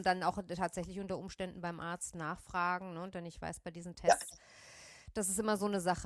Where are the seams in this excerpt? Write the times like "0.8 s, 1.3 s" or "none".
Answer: none